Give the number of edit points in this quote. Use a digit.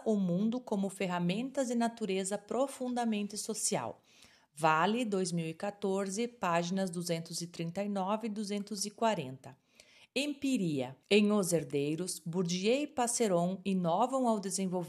1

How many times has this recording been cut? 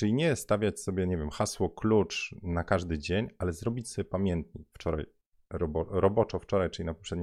1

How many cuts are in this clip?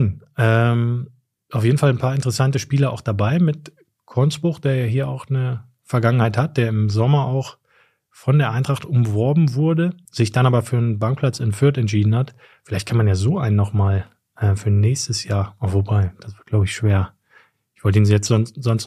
1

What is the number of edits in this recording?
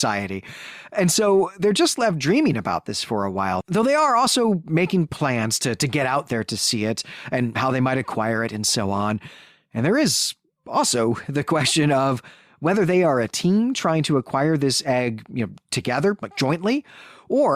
0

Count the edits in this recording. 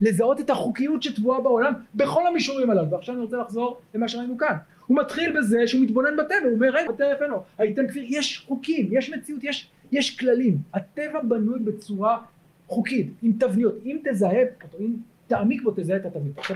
1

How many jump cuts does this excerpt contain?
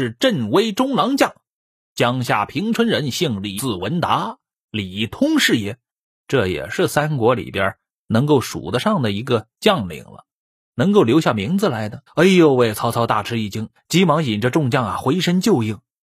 2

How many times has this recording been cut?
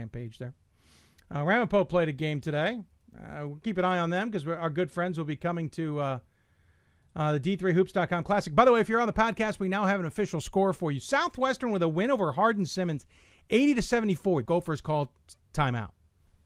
1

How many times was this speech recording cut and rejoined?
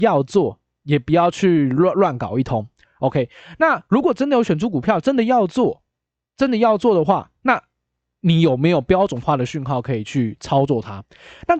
0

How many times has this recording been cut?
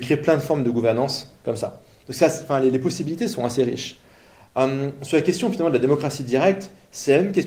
0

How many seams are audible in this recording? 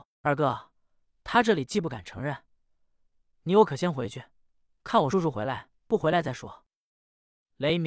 1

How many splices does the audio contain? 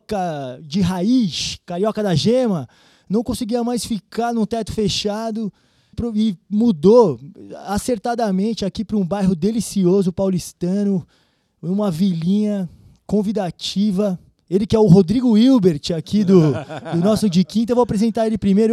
1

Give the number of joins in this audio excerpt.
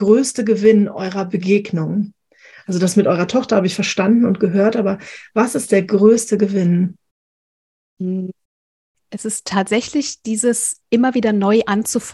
0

